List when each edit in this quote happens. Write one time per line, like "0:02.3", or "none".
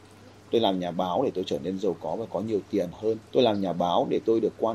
0:03.3